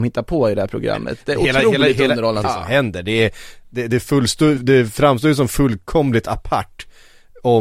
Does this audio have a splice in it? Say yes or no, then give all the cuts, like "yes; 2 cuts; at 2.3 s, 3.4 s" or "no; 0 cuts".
yes; 2 cuts; at 2.4 s, 4.6 s